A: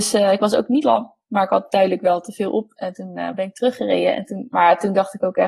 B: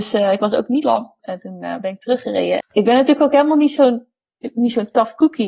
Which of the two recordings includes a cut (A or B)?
B